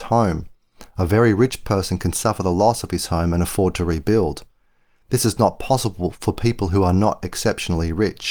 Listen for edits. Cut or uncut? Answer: uncut